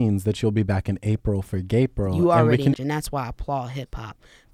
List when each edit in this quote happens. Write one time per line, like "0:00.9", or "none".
0:02.7